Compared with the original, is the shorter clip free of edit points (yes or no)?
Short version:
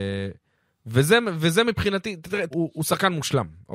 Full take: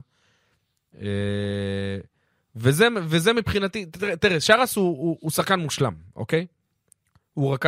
no